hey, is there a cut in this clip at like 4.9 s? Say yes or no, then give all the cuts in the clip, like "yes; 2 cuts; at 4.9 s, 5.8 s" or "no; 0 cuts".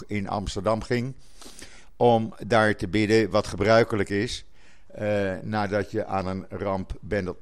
no; 0 cuts